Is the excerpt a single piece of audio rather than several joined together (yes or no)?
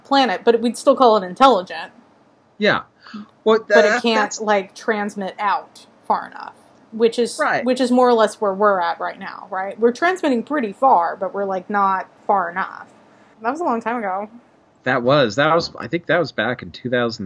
no